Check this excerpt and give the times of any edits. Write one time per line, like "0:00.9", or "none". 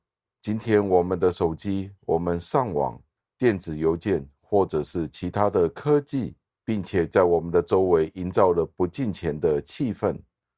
0:06.5